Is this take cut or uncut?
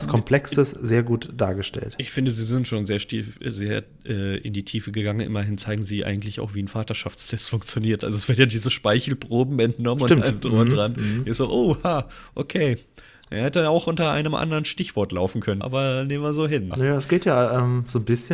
cut